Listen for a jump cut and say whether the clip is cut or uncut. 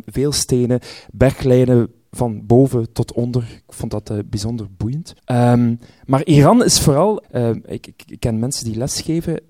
cut